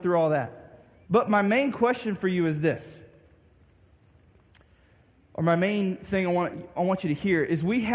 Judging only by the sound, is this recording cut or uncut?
cut